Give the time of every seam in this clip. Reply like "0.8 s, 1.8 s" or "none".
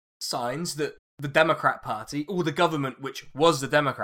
none